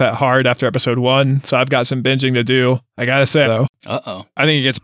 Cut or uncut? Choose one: cut